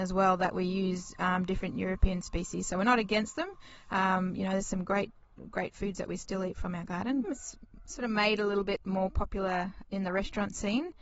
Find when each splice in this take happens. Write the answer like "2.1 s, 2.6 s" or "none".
7.2 s, 9.8 s